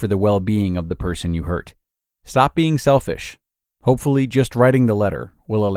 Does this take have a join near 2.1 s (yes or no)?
yes